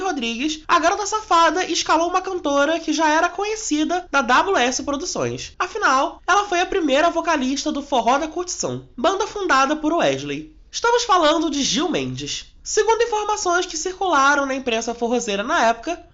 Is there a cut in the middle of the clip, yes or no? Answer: no